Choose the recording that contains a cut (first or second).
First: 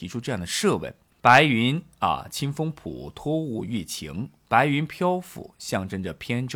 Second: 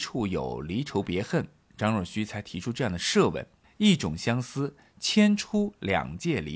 first